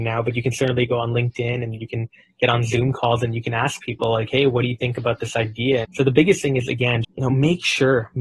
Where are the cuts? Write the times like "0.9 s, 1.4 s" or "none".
5.8 s, 7.0 s